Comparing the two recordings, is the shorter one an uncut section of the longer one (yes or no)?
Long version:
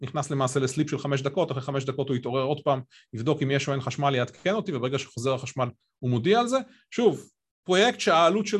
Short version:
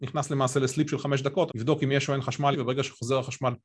no